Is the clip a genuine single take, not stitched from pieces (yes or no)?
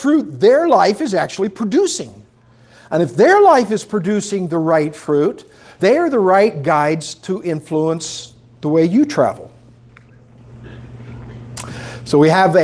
no